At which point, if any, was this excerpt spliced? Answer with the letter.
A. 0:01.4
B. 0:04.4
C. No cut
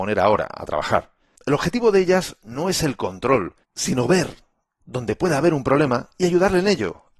A